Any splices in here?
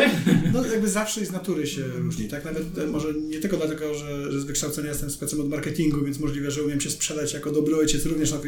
no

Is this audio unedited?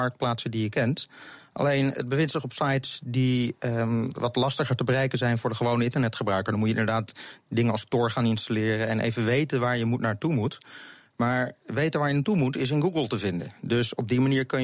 yes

